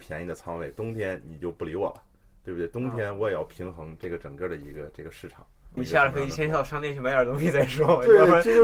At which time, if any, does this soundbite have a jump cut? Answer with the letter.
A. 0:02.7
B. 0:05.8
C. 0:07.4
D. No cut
B